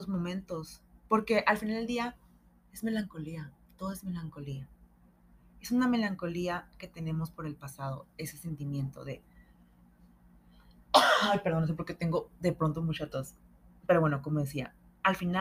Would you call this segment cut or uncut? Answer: uncut